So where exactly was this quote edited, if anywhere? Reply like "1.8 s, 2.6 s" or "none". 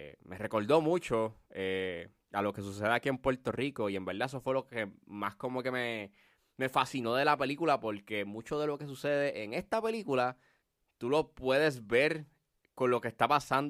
none